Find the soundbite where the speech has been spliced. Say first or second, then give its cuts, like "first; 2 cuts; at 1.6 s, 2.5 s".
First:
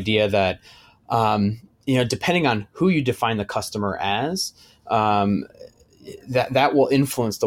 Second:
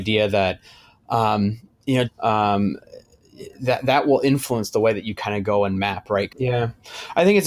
second; 2 cuts; at 2.1 s, 6.3 s